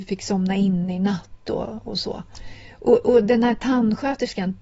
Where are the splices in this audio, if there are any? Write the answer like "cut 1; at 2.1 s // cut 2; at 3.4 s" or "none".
none